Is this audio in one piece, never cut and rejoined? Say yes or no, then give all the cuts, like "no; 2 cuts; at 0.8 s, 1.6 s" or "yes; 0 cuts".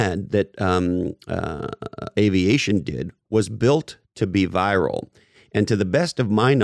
no; 1 cut; at 2.1 s